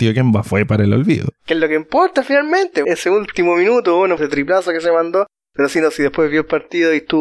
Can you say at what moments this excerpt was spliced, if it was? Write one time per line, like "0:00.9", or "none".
0:02.8
0:04.2